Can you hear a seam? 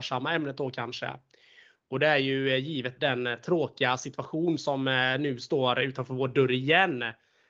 yes; 1 cut; at 3.0 s

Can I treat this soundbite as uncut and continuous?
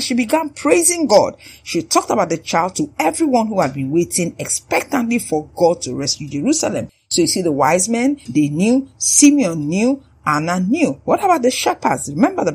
yes; 0 cuts

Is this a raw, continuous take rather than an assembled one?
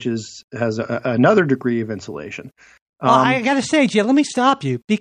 yes; 0 cuts

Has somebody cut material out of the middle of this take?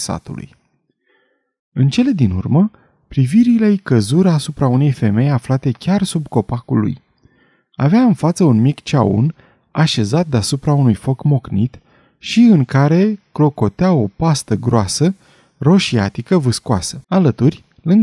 yes; 1 cut; at 17.0 s

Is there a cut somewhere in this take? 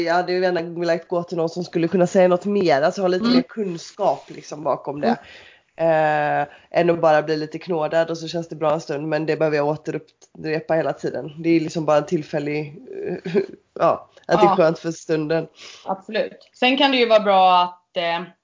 no; 0 cuts

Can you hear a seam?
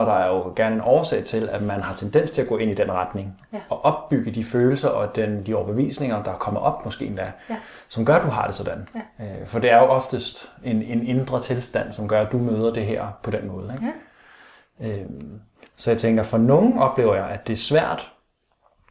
no; 0 cuts

